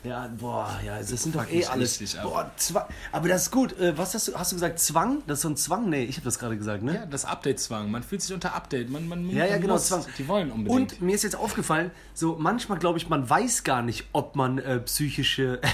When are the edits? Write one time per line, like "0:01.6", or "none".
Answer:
none